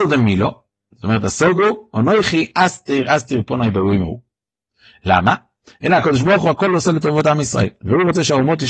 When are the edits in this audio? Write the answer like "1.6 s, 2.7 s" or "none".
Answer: none